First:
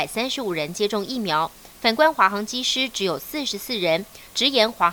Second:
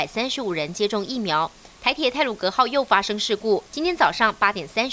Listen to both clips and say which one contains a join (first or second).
second